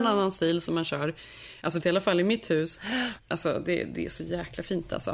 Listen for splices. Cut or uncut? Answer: cut